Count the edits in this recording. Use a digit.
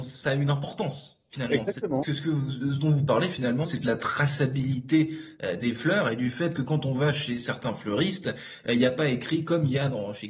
2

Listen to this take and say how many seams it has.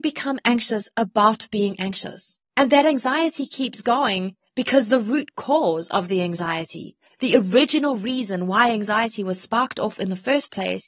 1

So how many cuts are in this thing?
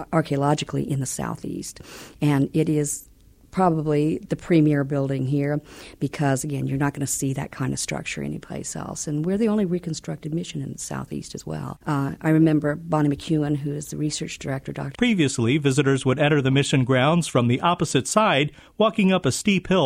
2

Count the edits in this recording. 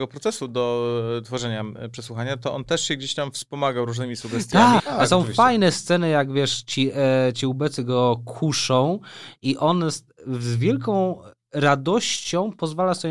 1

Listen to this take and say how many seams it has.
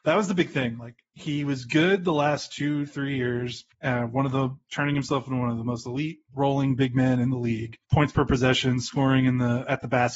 2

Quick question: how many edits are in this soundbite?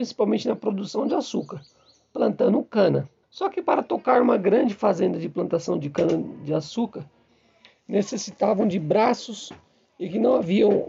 1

